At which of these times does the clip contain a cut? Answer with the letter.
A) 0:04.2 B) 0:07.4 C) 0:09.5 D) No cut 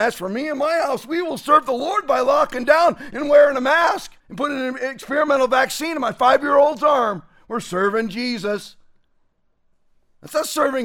A